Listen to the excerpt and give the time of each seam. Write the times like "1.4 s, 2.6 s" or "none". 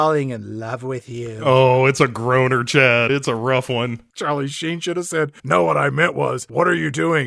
none